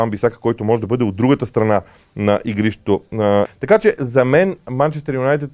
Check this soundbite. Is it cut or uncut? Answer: cut